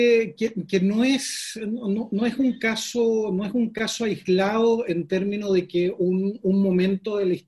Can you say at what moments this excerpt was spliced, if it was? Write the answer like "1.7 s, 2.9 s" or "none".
none